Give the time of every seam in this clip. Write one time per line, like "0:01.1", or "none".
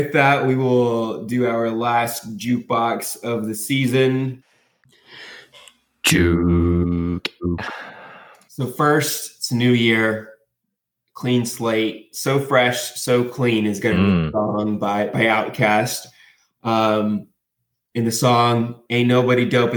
none

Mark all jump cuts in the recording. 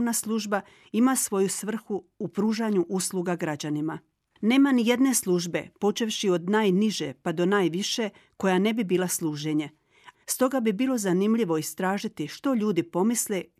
0:10.1

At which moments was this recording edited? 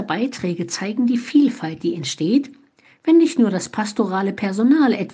none

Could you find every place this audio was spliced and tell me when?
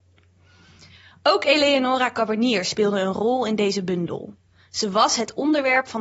none

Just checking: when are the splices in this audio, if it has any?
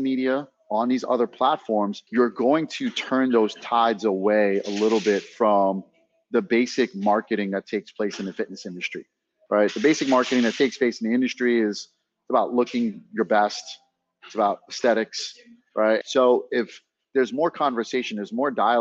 0:02.1
0:16.0

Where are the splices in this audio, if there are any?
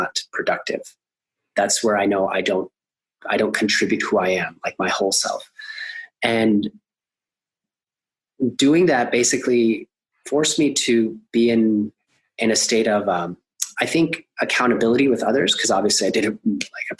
none

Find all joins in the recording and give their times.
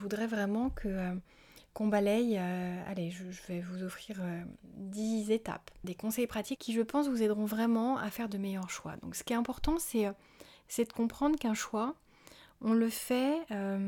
none

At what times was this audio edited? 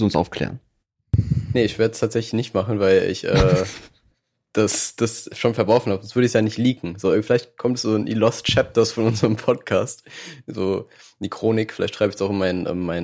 none

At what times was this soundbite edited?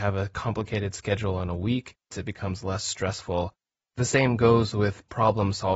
0:02.1

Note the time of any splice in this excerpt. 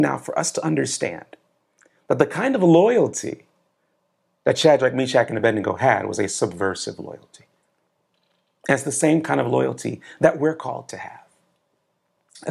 none

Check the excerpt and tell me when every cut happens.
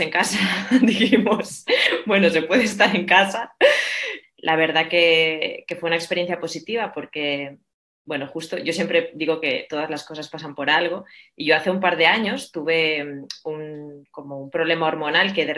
0:04.2

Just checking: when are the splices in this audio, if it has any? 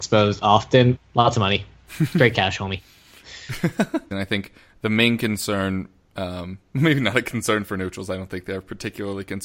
0:01.0
0:04.1

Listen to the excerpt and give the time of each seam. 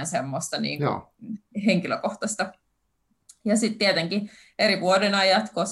none

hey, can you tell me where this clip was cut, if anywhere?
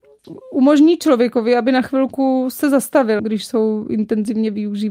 0:03.2

